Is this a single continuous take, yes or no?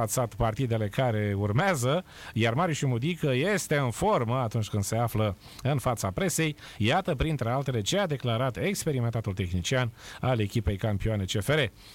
yes